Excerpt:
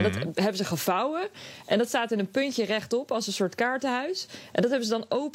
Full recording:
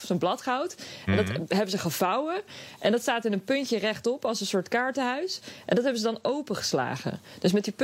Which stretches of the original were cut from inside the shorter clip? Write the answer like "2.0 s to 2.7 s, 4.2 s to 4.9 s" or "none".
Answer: none

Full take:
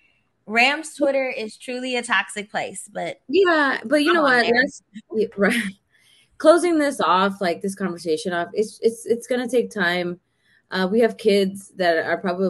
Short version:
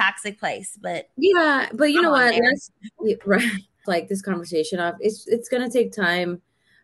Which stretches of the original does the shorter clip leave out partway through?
6.0 s to 7.4 s, 8.8 s to 9.0 s

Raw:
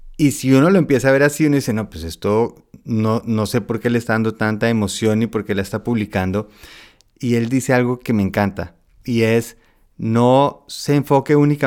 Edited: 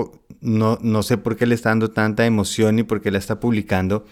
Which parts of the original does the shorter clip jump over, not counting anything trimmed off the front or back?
none

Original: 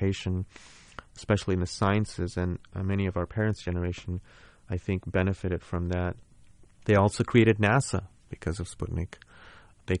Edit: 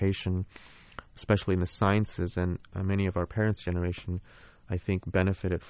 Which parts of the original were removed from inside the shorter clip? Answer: none

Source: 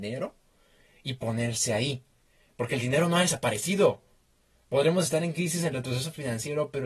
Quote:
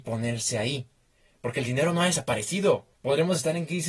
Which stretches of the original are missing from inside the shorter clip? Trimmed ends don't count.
4.1 s to 4.6 s

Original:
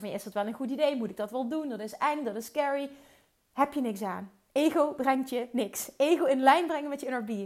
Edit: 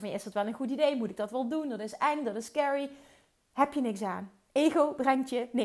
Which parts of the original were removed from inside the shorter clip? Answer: none

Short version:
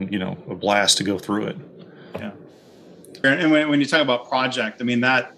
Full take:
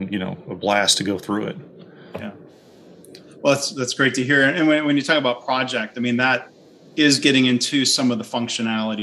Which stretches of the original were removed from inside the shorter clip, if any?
3.2 s to 4.4 s

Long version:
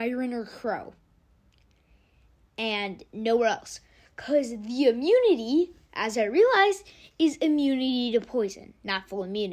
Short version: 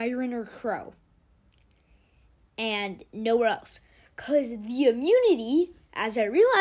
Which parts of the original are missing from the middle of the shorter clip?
none

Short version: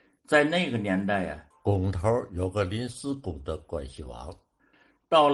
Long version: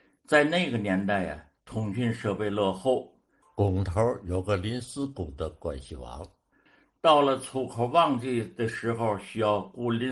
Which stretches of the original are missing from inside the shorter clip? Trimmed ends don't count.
1.5 s to 3.4 s

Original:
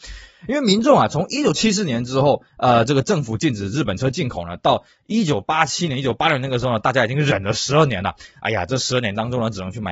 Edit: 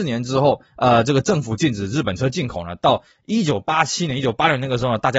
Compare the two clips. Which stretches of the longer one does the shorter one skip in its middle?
none

